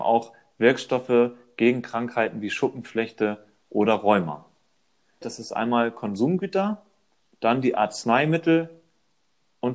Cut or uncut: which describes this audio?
cut